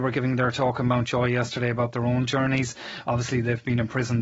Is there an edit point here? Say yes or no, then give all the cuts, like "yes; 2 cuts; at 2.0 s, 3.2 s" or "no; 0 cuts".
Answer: no; 0 cuts